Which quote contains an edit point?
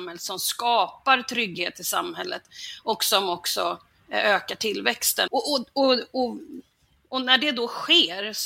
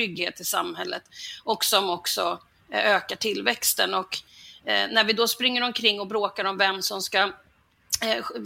first; 1 cut; at 5.3 s

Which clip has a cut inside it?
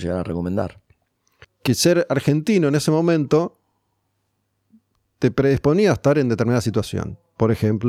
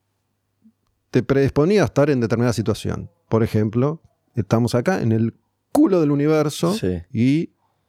first; 1 cut; at 1.4 s

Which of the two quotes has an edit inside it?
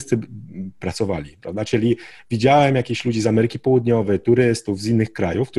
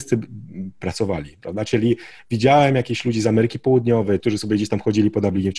second; 1 cut; at 4.2 s

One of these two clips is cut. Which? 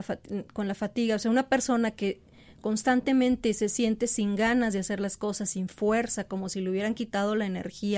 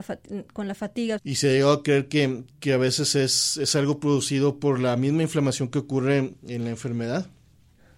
second; 2 cuts; at 1.2 s, 2.5 s

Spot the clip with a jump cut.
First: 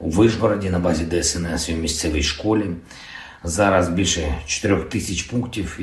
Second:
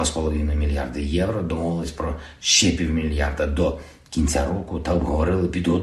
first; 1 cut; at 3.4 s

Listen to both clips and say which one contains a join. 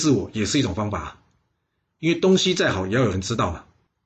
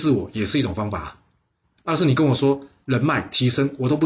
second; 1 cut; at 1.6 s

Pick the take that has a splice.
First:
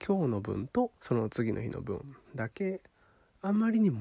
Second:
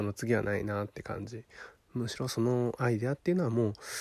first; 2 cuts; at 1.0 s, 2.2 s

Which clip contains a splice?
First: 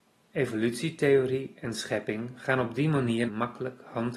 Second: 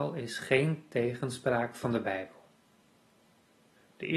first; 1 cut; at 3.3 s

